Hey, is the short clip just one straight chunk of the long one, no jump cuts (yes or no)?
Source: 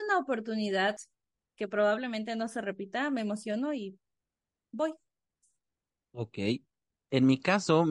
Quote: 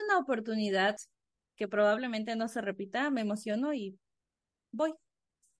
yes